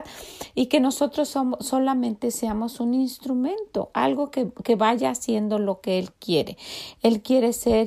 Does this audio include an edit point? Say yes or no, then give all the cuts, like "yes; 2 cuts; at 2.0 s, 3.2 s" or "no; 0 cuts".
no; 0 cuts